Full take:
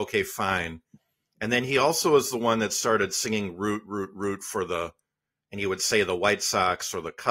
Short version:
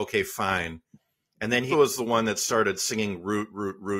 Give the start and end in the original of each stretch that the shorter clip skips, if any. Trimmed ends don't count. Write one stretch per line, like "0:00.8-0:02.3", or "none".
0:01.7-0:02.0

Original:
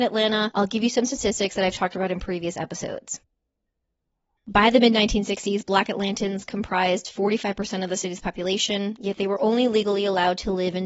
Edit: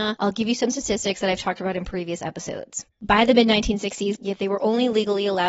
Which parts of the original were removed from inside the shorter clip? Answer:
0:03.3-0:04.4
0:05.6-0:09.0

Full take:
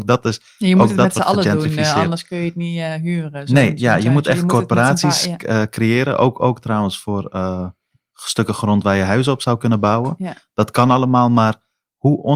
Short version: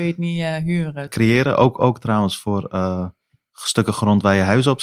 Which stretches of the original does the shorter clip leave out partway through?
0:03.4-0:05.7

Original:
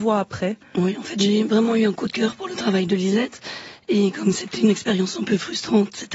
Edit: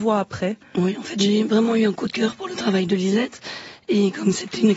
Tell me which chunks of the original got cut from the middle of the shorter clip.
none

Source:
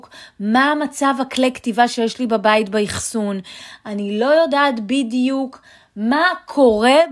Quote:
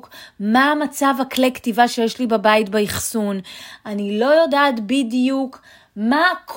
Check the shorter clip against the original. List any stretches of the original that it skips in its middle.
none

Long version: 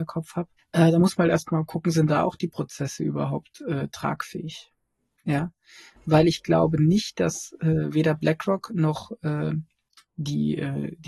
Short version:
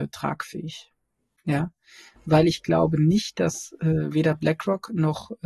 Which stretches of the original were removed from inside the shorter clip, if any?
none

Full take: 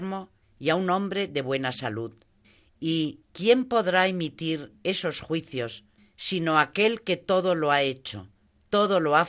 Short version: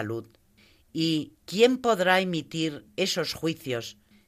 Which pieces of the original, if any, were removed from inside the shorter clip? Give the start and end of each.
none

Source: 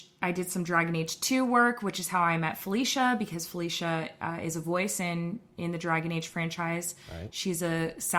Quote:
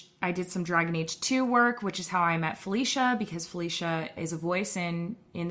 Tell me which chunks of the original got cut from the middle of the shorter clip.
0:04.2-0:04.4

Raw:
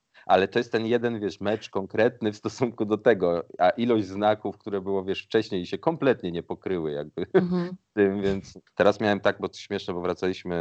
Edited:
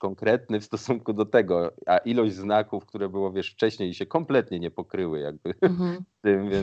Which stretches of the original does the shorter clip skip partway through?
none

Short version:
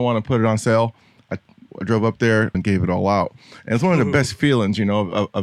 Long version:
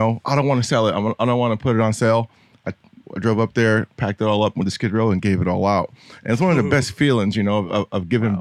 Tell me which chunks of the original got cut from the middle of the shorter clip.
0:03.9-0:05.1

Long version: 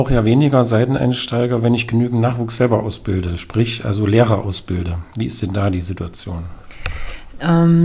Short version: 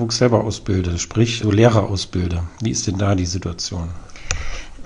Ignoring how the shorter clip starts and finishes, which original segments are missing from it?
0:03.8-0:04.0

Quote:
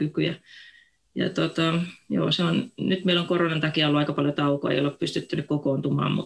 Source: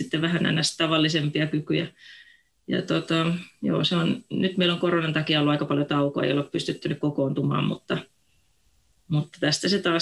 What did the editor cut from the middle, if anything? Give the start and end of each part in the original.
none

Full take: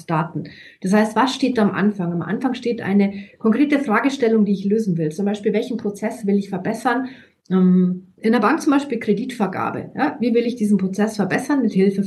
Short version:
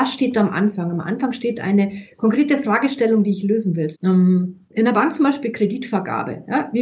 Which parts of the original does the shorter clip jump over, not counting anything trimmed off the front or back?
0:05.1-0:07.4

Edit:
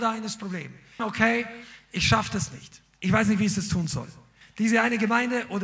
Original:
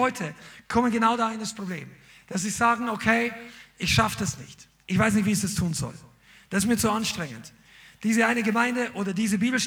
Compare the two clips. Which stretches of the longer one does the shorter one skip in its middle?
0:02.2-0:02.9
0:06.3-0:07.9

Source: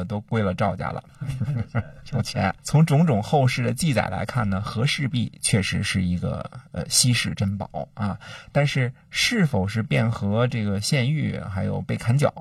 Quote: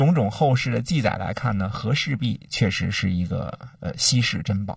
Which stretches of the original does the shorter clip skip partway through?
none

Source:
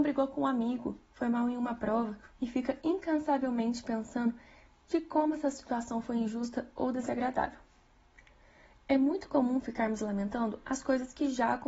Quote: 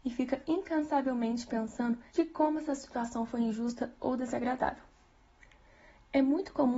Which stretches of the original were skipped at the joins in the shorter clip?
0:04.4-0:04.8

